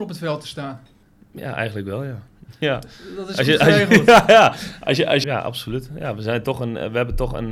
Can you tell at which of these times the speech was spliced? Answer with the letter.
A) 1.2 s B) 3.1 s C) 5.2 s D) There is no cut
C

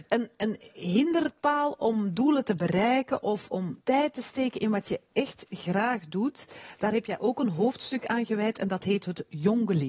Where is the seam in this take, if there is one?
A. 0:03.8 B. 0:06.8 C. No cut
A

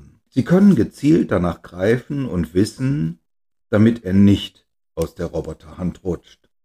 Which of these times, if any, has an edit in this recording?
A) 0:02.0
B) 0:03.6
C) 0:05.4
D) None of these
B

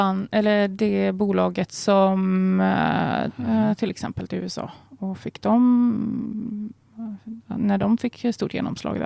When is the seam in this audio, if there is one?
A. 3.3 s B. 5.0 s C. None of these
A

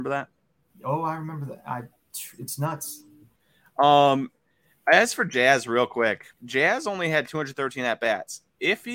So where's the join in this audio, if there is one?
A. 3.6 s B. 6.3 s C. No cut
B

